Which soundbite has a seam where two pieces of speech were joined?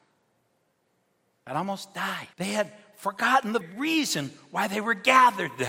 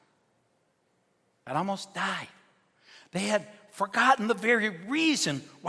first; 2 cuts; at 2.3 s, 3.6 s

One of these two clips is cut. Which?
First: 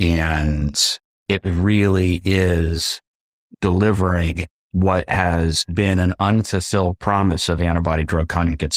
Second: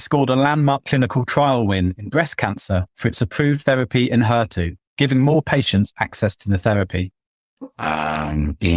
second; 2 cuts; at 4.9 s, 7.7 s

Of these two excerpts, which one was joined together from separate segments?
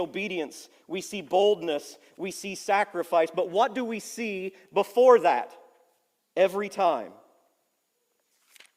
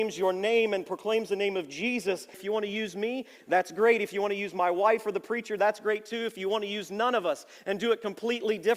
second; 1 cut; at 2.3 s

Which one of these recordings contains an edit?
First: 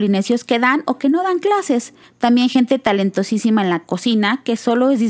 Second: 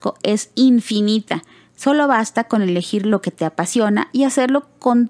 first; 1 cut; at 2.0 s

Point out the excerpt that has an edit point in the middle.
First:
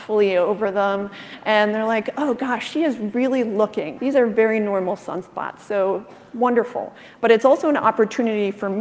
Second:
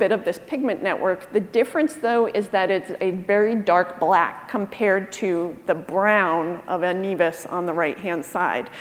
first; 1 cut; at 4.0 s

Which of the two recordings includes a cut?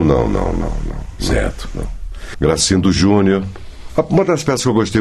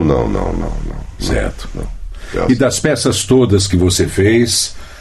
first; 1 cut; at 2.3 s

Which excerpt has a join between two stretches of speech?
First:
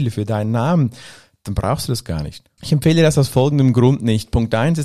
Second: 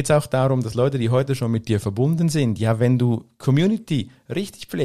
first; 1 cut; at 2.6 s

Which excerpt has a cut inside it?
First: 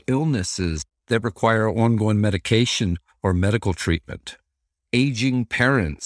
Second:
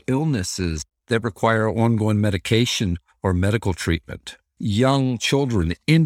second; 1 cut; at 4.6 s

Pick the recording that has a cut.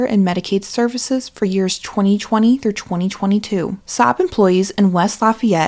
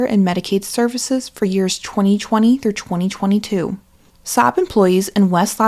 first; 1 cut; at 3.8 s

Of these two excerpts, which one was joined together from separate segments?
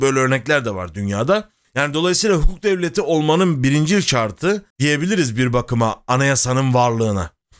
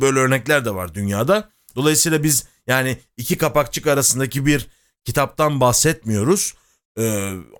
first; 2 cuts; at 1.6 s, 4.7 s

